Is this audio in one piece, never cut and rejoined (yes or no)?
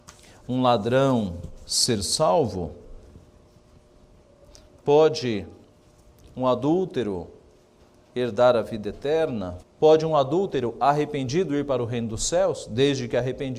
no